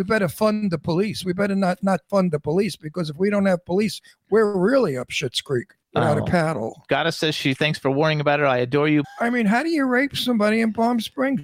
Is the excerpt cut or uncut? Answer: cut